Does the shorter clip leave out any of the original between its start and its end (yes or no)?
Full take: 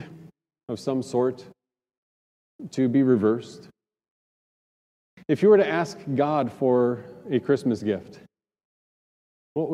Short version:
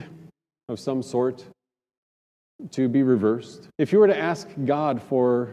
yes